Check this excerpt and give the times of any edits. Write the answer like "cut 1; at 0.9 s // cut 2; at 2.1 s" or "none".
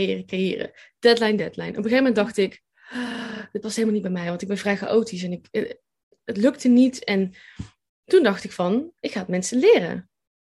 cut 1; at 1.4 s // cut 2; at 5.5 s

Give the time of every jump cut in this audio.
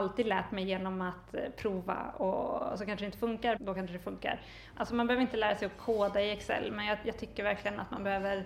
cut 1; at 3.6 s // cut 2; at 4.7 s

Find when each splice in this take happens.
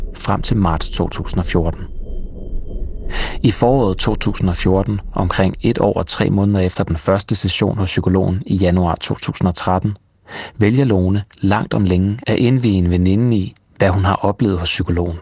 none

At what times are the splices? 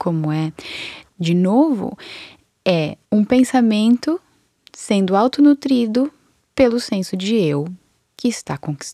cut 1; at 1.1 s // cut 2; at 3.0 s

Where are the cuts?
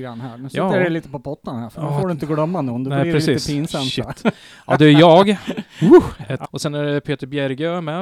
cut 1; at 6.4 s

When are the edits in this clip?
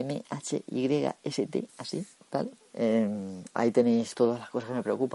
cut 1; at 2.6 s // cut 2; at 4.1 s

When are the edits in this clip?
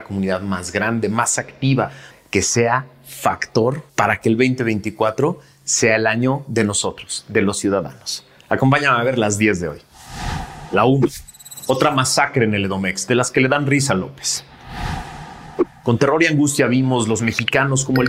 cut 1; at 2.1 s // cut 2; at 3.9 s

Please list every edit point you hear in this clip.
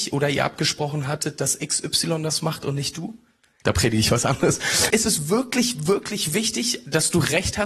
cut 1; at 3.6 s // cut 2; at 4.9 s

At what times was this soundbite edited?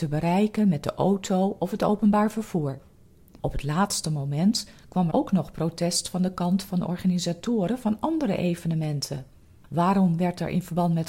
cut 1; at 5.1 s

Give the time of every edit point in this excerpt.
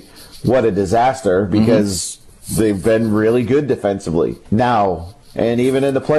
cut 1; at 4.5 s

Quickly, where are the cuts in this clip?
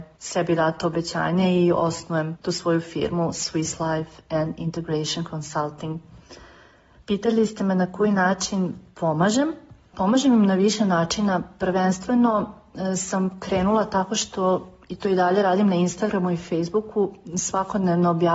none

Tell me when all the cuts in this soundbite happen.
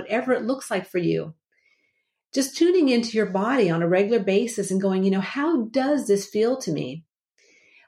none

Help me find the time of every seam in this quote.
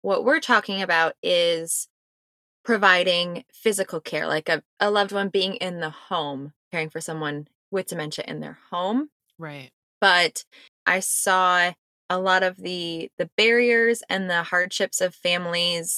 cut 1; at 6.6 s

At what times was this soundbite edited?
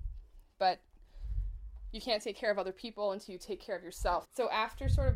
cut 1; at 4.2 s

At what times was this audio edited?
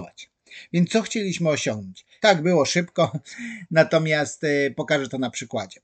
cut 1; at 2.2 s

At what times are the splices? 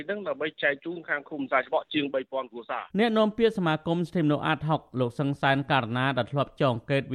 cut 1; at 2.9 s

